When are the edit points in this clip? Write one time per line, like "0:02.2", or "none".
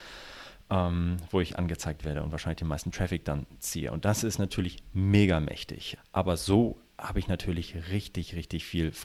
0:06.0